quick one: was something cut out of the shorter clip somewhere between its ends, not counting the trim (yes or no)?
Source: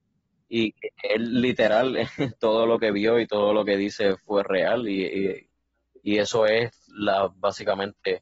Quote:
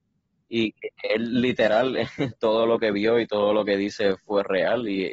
no